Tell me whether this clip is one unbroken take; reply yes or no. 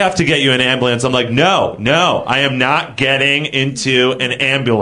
yes